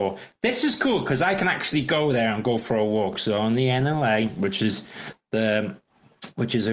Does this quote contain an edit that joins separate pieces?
no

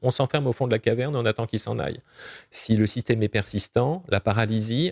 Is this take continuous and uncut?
yes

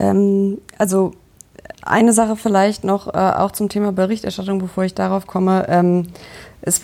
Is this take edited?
no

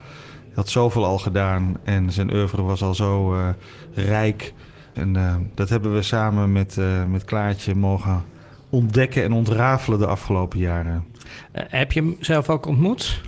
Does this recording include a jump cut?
yes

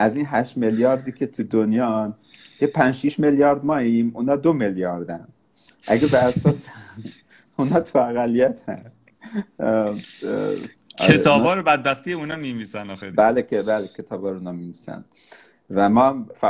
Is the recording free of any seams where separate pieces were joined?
yes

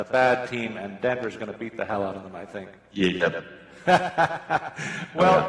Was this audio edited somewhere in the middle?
no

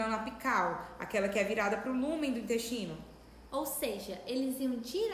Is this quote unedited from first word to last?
no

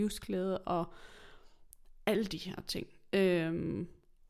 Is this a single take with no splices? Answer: yes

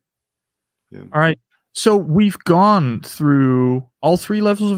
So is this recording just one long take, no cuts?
yes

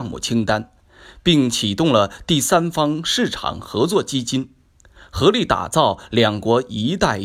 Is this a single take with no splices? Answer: yes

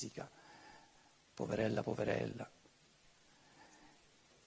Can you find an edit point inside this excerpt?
no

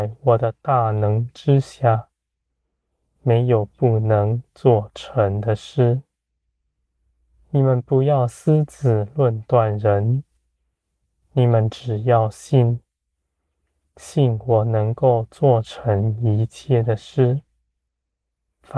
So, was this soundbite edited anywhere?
no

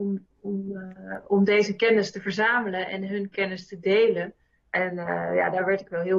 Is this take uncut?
no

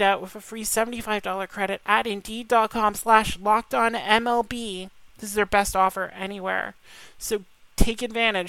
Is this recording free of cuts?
no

